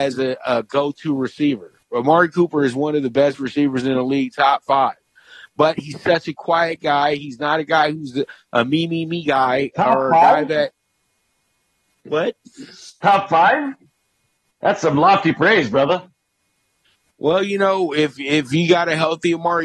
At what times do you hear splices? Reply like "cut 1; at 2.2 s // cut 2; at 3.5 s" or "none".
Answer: none